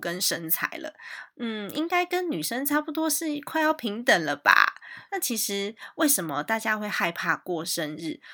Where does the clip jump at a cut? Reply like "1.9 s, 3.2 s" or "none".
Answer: 5.1 s